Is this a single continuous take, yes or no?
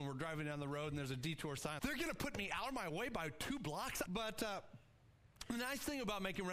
no